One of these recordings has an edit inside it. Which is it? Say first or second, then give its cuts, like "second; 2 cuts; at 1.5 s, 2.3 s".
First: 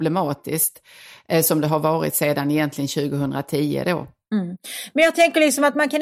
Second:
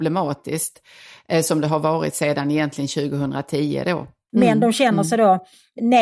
second; 1 cut; at 4.3 s